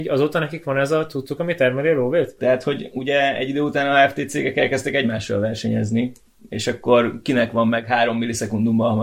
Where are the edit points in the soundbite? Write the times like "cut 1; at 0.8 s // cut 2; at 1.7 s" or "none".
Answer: cut 1; at 2.4 s